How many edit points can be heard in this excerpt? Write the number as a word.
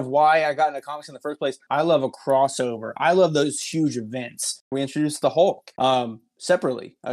two